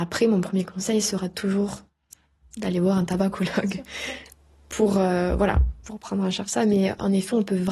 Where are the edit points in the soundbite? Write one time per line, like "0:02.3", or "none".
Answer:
none